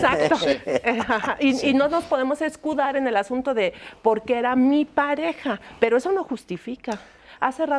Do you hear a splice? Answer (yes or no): no